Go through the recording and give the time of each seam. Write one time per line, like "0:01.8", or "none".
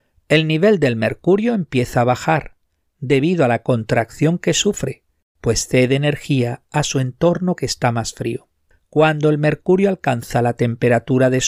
none